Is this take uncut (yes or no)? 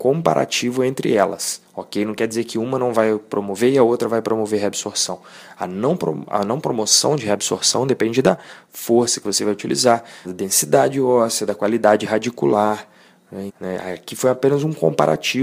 no